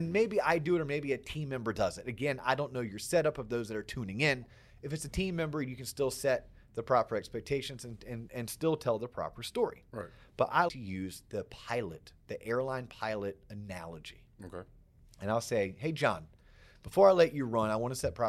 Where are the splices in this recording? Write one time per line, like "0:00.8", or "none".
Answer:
0:10.7